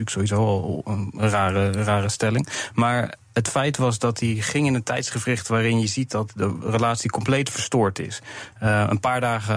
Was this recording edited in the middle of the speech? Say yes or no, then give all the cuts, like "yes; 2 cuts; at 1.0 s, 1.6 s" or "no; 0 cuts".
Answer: no; 0 cuts